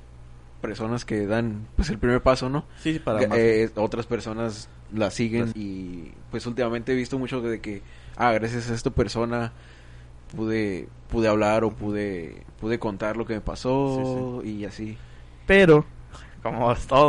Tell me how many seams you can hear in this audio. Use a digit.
1